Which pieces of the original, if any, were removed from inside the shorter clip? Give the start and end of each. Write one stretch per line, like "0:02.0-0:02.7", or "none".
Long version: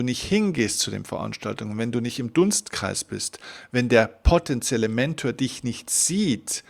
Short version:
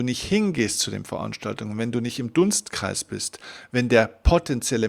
none